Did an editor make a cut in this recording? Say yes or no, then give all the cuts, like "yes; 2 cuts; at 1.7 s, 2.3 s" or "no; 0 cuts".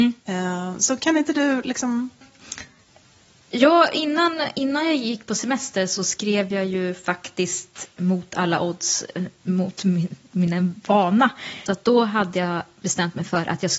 yes; 2 cuts; at 2.2 s, 11.7 s